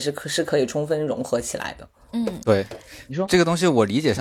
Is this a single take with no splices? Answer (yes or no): yes